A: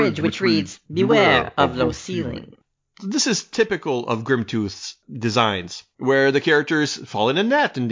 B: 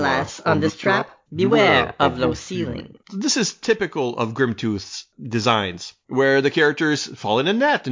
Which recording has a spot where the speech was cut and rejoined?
B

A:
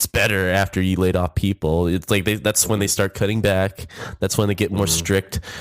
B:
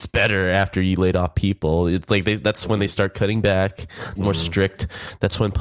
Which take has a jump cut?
B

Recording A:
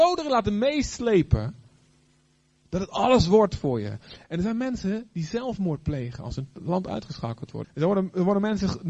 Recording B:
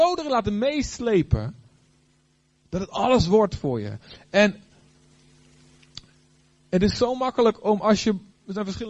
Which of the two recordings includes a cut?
A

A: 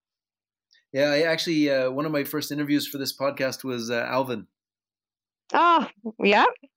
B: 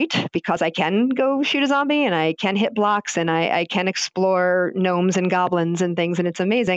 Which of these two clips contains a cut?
A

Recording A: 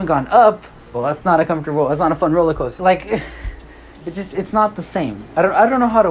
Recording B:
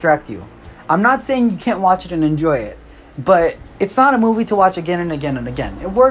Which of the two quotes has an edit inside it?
A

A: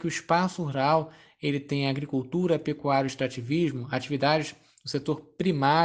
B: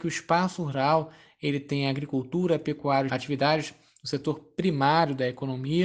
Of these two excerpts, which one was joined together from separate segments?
B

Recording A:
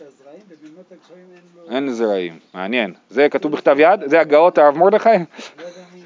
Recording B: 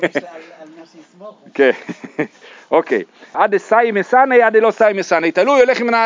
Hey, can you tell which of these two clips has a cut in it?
B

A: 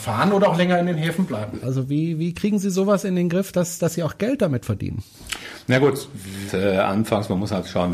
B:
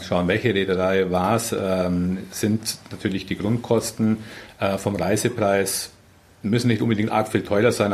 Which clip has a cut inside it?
A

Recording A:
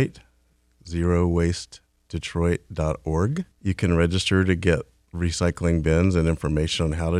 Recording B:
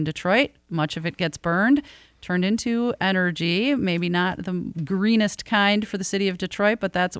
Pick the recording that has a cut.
A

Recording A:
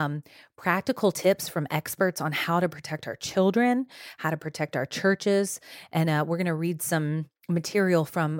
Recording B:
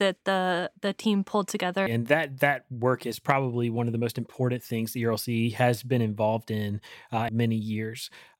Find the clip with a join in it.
B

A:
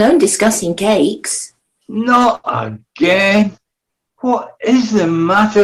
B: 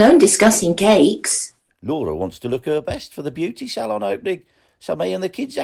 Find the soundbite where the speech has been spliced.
B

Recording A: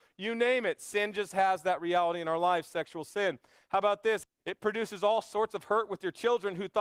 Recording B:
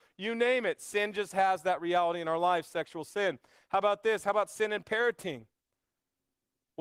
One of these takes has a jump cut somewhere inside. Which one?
A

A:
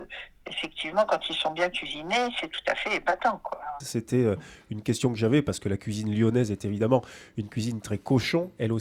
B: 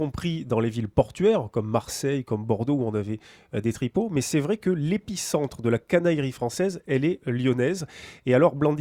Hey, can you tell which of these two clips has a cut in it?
A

